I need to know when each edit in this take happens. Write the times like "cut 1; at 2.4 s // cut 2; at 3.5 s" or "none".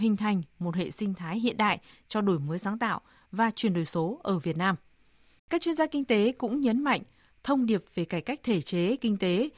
cut 1; at 5.4 s